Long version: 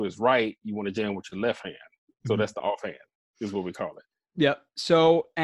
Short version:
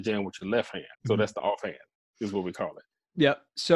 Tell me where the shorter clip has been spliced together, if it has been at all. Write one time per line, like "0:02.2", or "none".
0:00.9